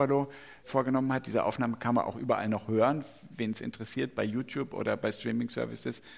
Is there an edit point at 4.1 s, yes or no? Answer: no